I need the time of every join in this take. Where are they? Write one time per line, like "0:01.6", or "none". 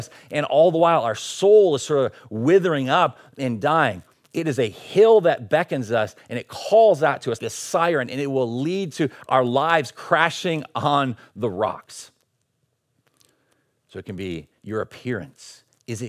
0:07.4